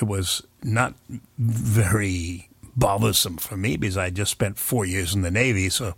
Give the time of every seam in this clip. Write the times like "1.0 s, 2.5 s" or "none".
none